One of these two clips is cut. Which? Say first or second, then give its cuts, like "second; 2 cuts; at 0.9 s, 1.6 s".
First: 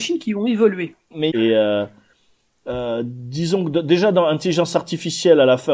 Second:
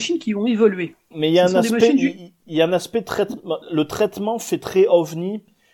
first; 1 cut; at 1.3 s